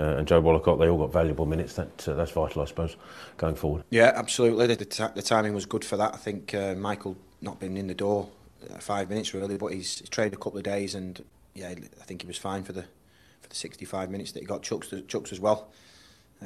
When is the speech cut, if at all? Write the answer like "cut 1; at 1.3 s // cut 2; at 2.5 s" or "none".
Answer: cut 1; at 4.8 s